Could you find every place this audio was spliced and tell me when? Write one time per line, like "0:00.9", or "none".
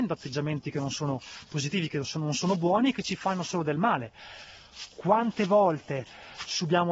0:04.9